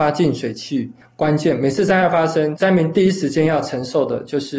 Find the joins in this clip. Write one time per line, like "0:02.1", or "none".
0:01.0